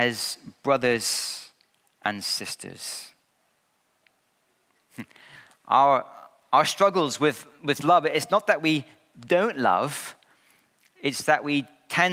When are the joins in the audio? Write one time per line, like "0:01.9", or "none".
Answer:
none